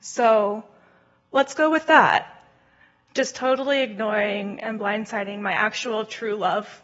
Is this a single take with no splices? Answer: yes; 0 cuts

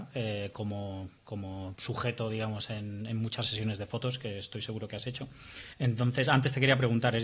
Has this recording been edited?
yes; 1 cut; at 5.7 s

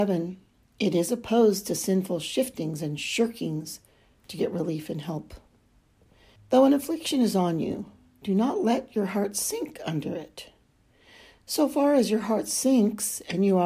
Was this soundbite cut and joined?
yes; 1 cut; at 6.4 s

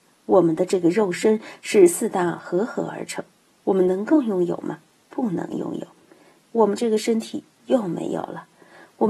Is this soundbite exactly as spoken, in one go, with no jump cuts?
no; 1 cut; at 6.4 s

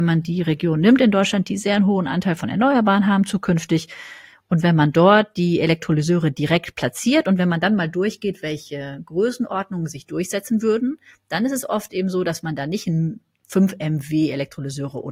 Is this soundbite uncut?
yes; 0 cuts

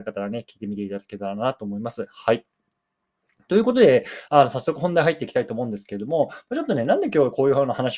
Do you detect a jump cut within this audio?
no; 0 cuts

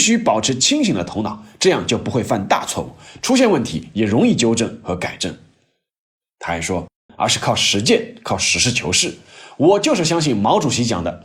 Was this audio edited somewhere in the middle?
yes; 1 cut; at 7.1 s

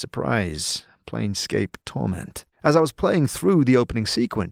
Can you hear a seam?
yes; 1 cut; at 2.5 s

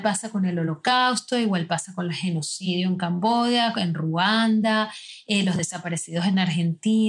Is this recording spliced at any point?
no; 0 cuts

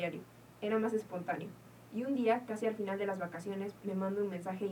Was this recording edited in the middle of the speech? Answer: no; 0 cuts

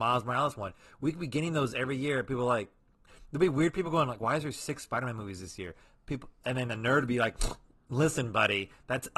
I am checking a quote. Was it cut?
no; 0 cuts

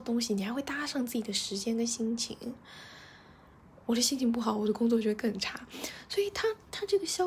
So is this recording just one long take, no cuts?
no; 1 cut; at 3.8 s

